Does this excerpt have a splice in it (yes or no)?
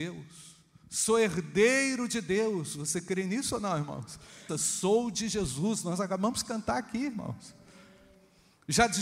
yes